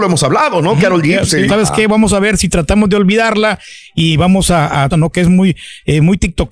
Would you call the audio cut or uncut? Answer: cut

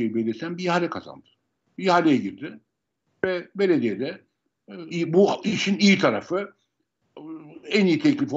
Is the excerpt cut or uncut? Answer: cut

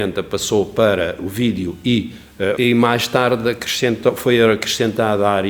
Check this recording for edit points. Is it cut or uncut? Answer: cut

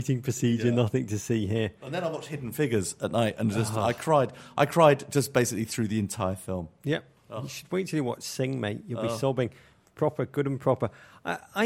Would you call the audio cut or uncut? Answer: uncut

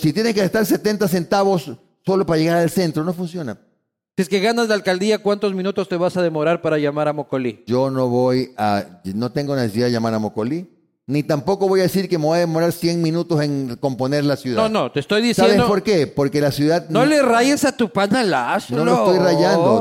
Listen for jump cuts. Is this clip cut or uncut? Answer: uncut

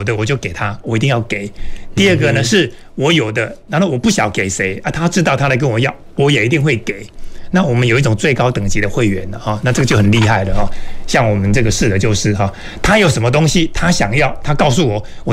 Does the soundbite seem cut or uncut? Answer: uncut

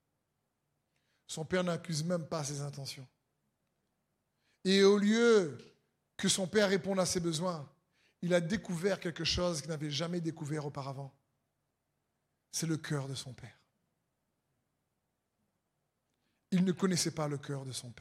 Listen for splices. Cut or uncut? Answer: uncut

